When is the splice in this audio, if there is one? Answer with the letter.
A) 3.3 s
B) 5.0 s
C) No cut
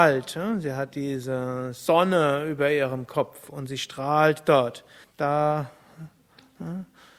B